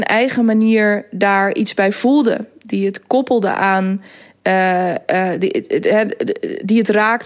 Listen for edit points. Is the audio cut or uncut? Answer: uncut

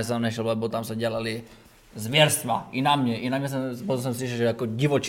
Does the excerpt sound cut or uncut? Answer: uncut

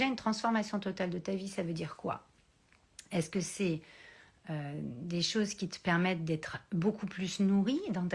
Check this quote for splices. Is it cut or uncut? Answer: uncut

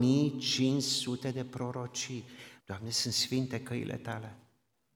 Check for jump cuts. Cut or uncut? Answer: cut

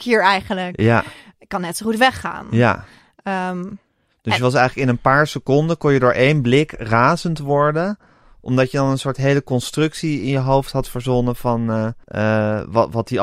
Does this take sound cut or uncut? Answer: cut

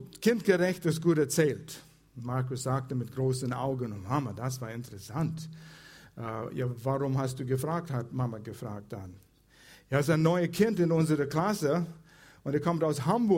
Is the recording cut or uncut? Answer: uncut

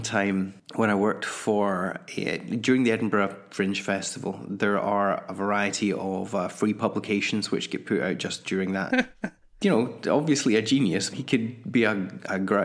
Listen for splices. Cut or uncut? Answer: cut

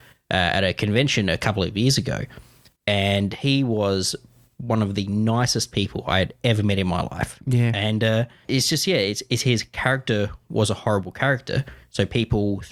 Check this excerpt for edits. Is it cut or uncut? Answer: uncut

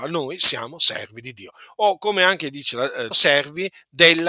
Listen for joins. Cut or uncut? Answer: cut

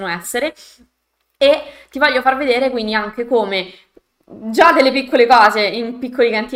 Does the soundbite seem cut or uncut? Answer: uncut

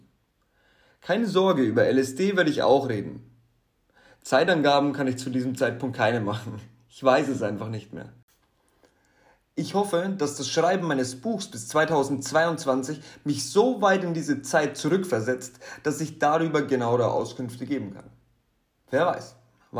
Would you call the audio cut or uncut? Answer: uncut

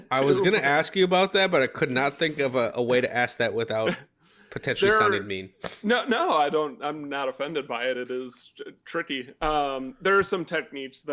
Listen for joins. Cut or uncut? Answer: uncut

